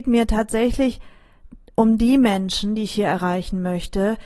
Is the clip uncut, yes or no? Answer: yes